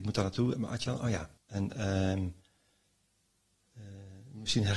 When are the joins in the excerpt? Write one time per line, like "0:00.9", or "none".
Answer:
0:01.4